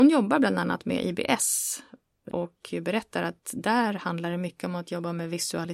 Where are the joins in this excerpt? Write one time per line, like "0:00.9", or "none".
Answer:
0:02.3